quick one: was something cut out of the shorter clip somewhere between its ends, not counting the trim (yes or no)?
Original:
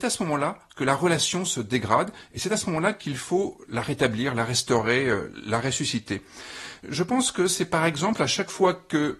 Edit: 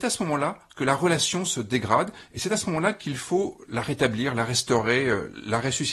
no